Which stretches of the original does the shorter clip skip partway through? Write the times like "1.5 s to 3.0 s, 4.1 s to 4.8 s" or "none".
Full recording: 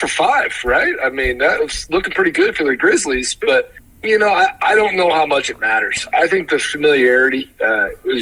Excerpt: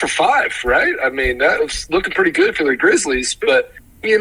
none